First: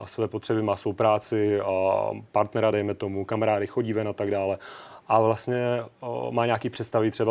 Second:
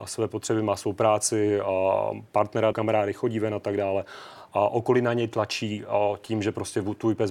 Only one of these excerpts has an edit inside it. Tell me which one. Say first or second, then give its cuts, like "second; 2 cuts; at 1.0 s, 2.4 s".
second; 2 cuts; at 2.7 s, 4.5 s